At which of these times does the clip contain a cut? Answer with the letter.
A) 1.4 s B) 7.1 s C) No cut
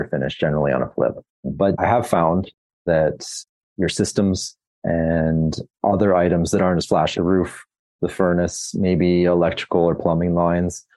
B